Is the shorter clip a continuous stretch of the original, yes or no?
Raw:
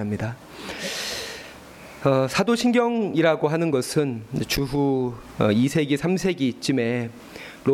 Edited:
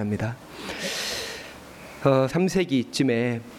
no